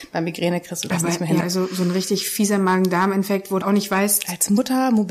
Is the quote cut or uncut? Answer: cut